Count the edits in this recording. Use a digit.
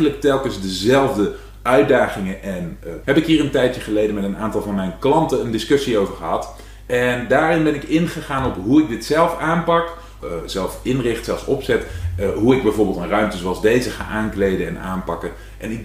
2